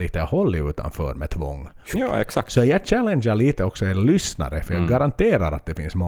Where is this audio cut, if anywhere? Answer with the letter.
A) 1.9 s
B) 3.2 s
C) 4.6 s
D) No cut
A